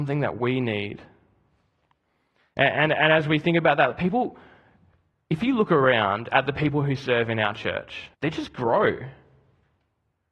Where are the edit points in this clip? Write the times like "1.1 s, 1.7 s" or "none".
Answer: 8.1 s